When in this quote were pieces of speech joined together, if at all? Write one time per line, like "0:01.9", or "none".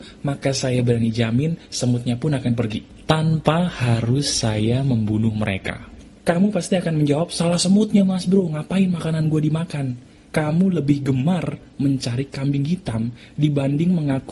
0:06.2
0:10.3

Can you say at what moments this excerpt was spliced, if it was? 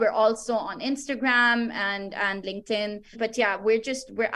0:03.1

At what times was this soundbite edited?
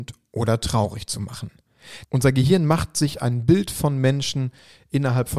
0:02.0

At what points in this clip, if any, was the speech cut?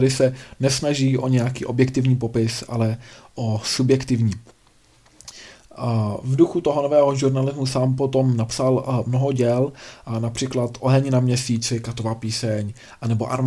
none

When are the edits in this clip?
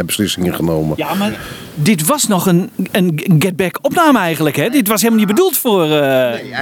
none

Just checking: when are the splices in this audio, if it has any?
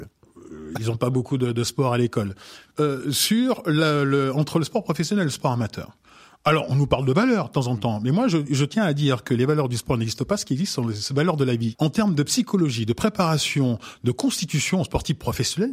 0:02.7
0:11.7

